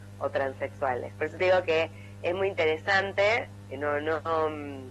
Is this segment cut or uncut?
uncut